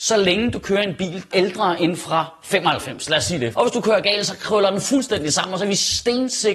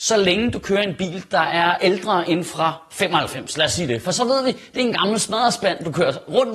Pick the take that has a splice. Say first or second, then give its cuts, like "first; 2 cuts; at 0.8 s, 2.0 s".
first; 2 cuts; at 1.3 s, 3.5 s